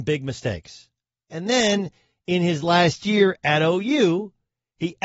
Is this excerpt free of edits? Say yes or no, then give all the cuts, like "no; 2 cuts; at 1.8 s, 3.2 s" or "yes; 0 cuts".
no; 1 cut; at 1.3 s